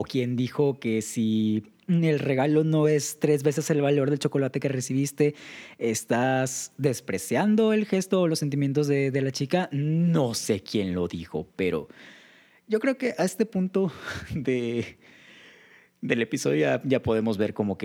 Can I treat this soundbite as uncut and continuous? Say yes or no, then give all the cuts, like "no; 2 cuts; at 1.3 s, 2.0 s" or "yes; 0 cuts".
yes; 0 cuts